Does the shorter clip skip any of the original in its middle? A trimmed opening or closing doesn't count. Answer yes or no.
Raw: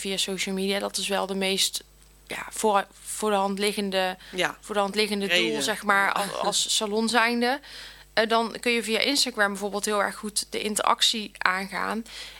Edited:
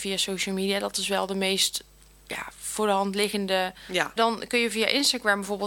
yes